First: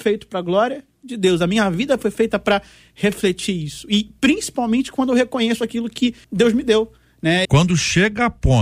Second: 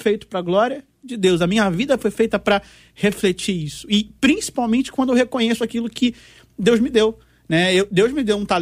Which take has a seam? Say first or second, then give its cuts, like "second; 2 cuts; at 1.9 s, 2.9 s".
first; 2 cuts; at 6.2 s, 7.4 s